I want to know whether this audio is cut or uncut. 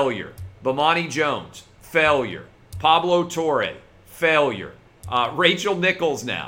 uncut